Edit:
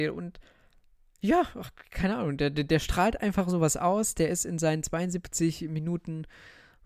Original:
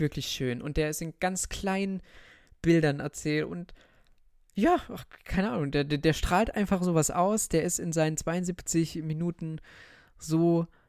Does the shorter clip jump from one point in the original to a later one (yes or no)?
no